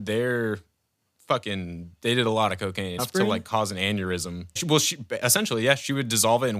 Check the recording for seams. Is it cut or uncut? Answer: cut